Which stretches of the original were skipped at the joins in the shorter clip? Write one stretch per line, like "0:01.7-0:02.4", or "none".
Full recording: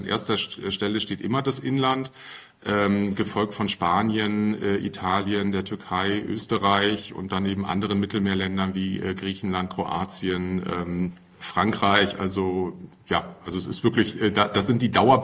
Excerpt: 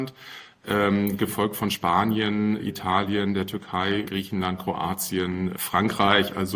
0:04.6-0:04.8
0:06.2-0:09.2
0:10.6-0:11.4

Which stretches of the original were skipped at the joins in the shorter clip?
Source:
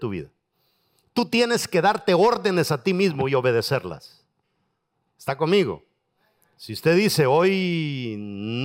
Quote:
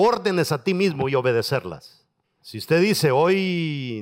0:04.6-0:06.5

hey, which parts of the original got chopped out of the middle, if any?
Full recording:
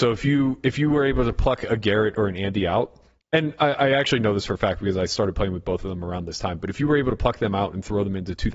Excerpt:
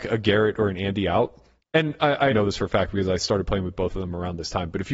0:03.9-0:04.2

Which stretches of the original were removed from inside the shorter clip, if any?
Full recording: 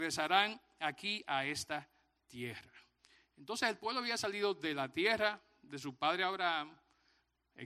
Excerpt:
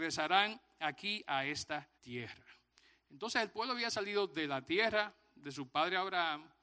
0:01.9-0:02.2

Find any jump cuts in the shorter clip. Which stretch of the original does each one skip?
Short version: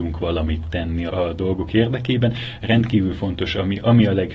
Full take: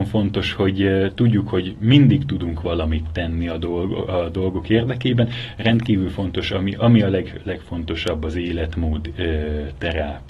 0:03.5-0:04.1

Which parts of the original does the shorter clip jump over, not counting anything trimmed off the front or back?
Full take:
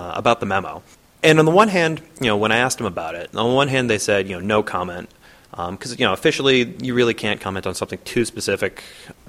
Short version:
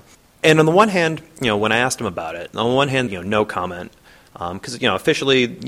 0:03.9-0:04.2

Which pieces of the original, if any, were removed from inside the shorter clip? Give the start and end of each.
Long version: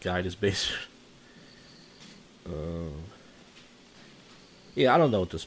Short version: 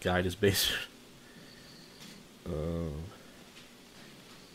none

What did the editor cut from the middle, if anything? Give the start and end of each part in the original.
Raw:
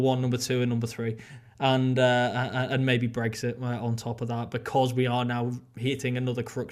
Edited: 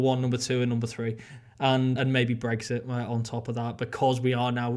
0:02.0-0:02.7

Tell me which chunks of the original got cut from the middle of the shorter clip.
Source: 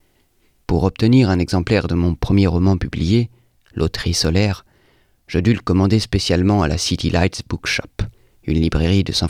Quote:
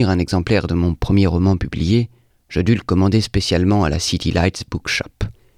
0:03.5-0:05.1

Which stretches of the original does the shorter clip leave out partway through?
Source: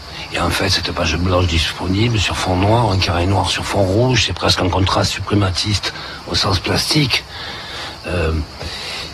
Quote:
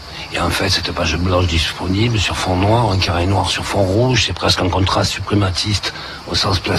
none

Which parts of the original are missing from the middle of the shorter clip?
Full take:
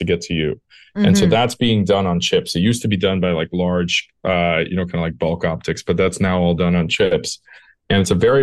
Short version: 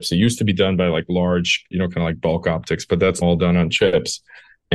0:04.1-0:04.7
0:06.2-0:06.4

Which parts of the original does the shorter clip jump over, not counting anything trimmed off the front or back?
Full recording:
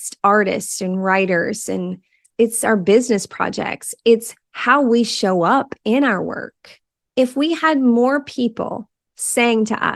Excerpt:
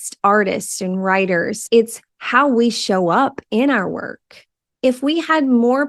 0:01.7-0:04.0

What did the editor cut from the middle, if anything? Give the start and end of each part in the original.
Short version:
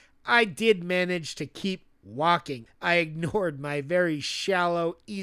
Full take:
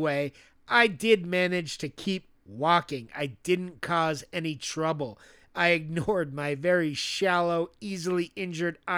0:03.1-0:05.4

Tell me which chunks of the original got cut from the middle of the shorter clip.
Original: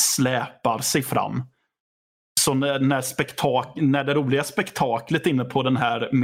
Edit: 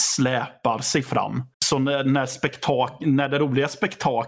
0:01.5-0:02.3

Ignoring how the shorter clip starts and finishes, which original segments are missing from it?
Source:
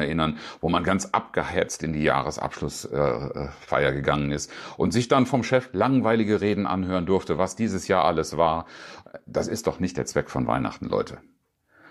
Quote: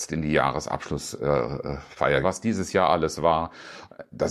0:03.9-0:07.4

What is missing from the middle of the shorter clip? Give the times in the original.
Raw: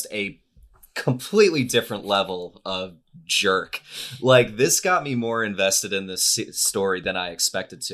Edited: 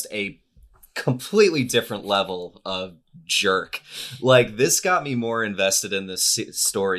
none

